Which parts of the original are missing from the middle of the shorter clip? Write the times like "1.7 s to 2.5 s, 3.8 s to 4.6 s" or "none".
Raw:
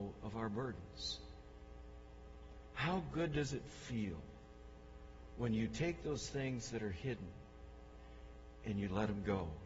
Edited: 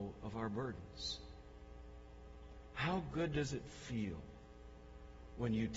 none